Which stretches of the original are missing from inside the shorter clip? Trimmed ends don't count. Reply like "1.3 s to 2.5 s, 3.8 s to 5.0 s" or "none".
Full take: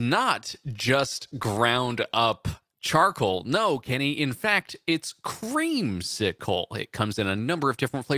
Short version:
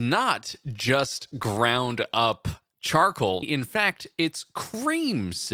3.4 s to 4.1 s